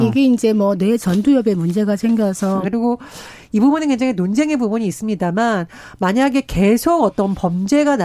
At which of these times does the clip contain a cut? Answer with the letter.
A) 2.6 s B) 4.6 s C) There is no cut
A